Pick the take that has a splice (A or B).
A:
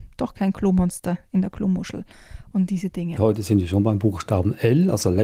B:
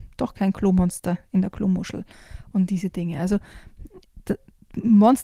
A